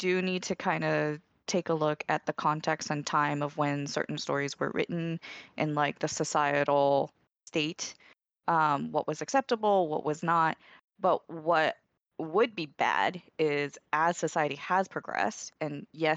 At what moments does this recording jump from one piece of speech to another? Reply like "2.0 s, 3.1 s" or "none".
none